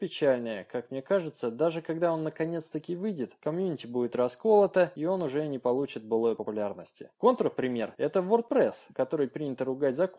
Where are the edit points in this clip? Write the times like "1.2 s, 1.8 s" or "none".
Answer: none